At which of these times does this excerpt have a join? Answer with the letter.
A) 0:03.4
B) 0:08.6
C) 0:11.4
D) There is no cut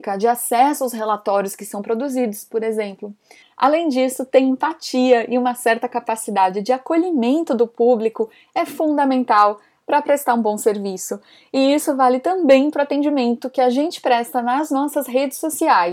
A